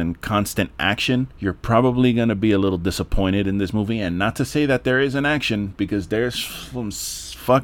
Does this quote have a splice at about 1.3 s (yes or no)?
yes